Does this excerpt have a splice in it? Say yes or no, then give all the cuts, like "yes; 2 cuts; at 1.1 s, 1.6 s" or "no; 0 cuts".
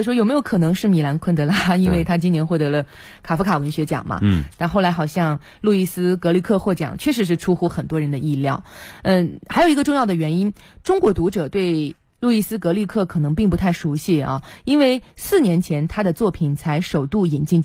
no; 0 cuts